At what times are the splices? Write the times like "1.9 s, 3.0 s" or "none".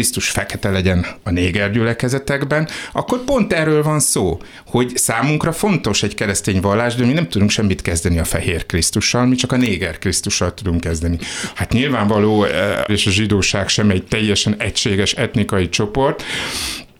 11.5 s, 12.9 s